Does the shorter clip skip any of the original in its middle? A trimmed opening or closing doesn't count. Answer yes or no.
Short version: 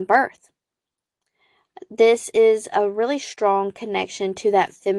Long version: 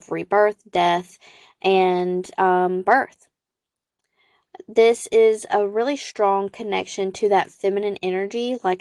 no